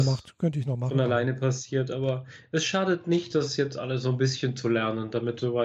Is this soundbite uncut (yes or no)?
yes